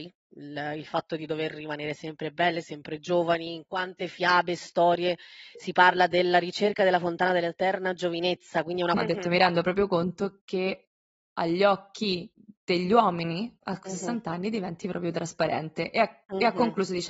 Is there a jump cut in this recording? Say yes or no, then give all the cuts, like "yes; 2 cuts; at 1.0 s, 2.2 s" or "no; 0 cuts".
yes; 1 cut; at 9.0 s